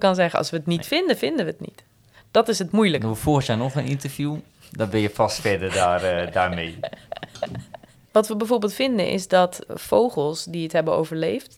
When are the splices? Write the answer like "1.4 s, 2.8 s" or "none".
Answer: 8.0 s, 9.7 s

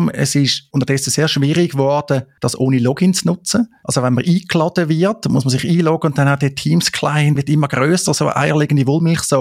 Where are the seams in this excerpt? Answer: 7.4 s

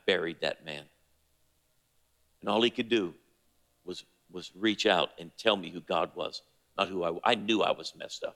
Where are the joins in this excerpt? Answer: none

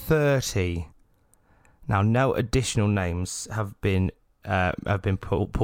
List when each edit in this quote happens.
none

